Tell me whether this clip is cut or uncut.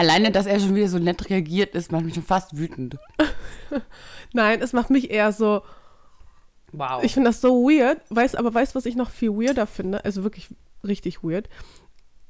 uncut